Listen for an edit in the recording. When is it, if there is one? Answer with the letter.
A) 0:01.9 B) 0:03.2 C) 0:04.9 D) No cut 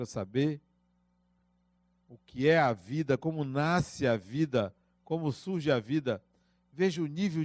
D